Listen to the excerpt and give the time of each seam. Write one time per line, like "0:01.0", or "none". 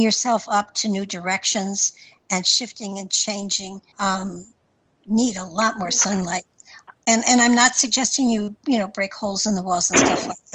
0:03.9